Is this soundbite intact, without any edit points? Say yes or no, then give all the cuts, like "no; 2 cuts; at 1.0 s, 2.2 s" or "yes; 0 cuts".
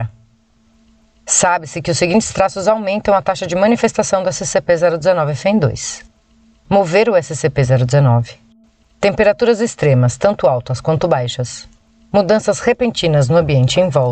no; 1 cut; at 8.8 s